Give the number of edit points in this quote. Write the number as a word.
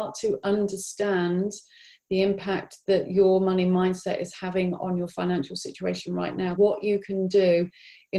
one